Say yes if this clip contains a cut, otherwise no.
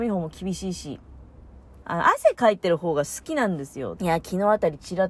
yes